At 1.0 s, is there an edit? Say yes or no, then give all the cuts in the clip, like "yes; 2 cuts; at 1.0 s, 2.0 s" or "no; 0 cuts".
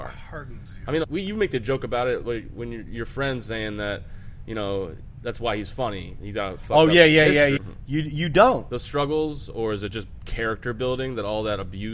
yes; 3 cuts; at 1.0 s, 7.6 s, 8.7 s